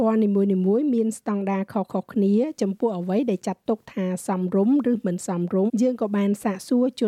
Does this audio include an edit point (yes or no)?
yes